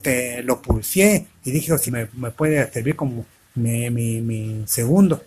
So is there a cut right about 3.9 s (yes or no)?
no